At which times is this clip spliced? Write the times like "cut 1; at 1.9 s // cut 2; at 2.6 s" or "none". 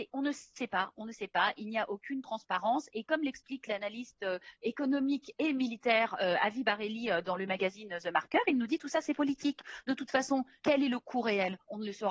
none